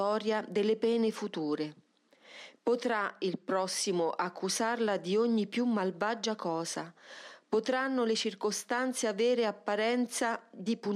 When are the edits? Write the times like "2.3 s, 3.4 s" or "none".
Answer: 2.6 s